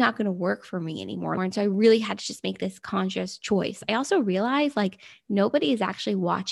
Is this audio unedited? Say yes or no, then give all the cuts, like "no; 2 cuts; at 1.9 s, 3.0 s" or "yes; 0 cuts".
no; 1 cut; at 1.4 s